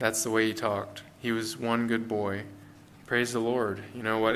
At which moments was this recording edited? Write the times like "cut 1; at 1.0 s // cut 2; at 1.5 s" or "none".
cut 1; at 2.9 s